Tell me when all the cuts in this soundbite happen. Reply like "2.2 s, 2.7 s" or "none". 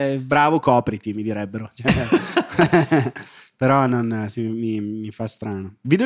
none